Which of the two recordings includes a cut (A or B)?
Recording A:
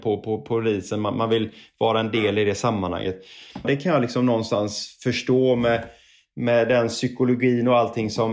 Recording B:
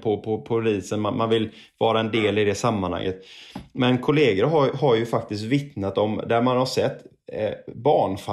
A